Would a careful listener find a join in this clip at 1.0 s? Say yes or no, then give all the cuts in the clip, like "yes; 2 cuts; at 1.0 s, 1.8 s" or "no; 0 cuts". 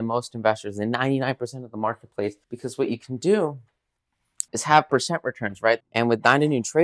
no; 3 cuts; at 2.4 s, 4.5 s, 5.8 s